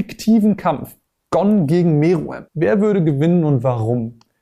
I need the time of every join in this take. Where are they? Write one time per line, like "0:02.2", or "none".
0:02.5